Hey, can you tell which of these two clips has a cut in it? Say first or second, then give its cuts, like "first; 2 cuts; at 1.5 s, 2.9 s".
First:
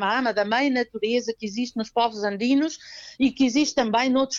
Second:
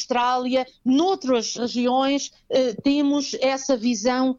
second; 1 cut; at 1.6 s